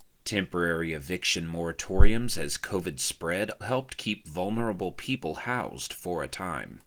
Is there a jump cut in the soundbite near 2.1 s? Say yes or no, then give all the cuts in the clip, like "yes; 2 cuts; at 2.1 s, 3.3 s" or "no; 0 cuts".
no; 1 cut; at 3.6 s